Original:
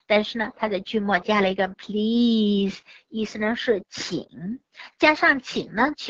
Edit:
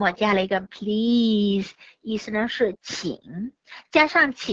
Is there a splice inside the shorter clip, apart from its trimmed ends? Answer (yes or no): no